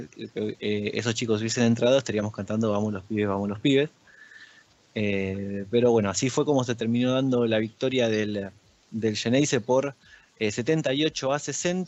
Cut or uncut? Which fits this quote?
uncut